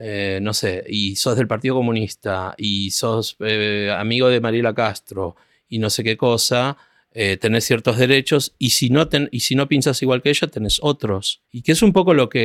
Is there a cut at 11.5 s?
yes; 1 cut; at 11.5 s

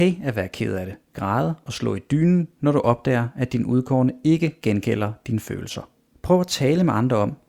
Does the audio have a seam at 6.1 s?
yes; 1 cut; at 6.1 s

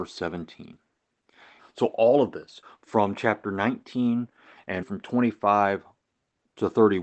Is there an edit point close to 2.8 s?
no; 2 cuts; at 1.6 s, 4.8 s

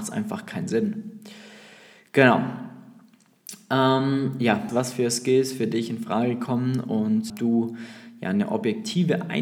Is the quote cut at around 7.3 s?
yes; 2 cuts; at 4.7 s, 7.3 s

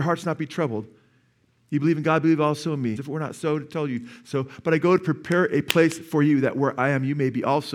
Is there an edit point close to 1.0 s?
no; 1 cut; at 3.0 s

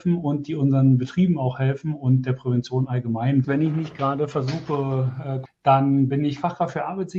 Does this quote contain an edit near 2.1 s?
no; 2 cuts; at 3.4 s, 5.4 s

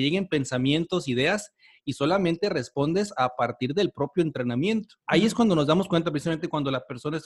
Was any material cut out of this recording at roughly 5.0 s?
yes; 1 cut; at 5.0 s

